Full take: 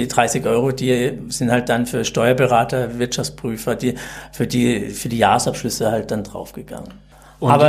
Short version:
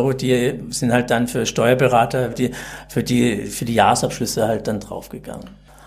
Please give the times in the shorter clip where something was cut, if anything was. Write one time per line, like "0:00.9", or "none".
0:02.3